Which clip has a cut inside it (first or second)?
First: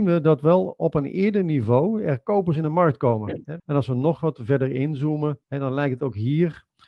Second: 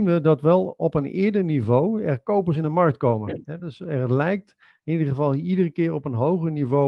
first